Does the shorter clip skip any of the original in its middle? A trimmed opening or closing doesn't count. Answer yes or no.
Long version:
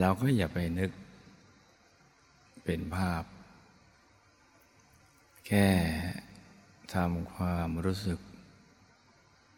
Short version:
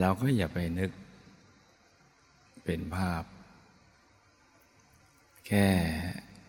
no